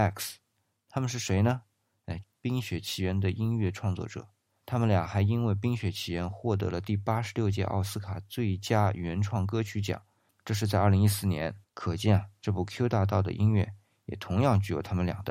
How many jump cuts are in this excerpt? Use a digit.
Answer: 2